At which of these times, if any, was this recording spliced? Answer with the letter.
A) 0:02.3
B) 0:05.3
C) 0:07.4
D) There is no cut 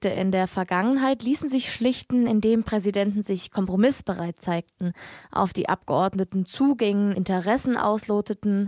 D